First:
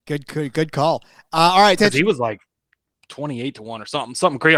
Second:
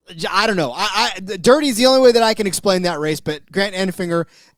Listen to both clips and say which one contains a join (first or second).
first